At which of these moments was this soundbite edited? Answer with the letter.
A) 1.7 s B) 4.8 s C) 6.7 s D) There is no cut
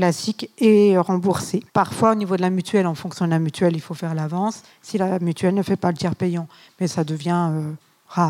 A